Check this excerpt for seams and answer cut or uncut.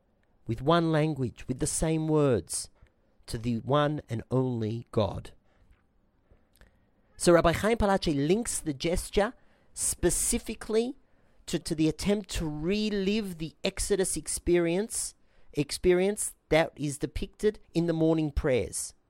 cut